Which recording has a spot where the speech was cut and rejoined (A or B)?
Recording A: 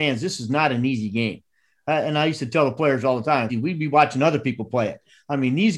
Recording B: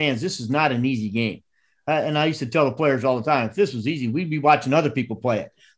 A